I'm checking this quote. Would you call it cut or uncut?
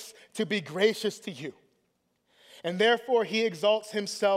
uncut